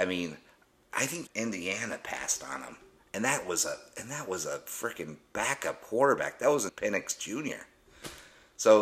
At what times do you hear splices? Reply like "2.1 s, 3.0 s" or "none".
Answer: 1.3 s, 6.7 s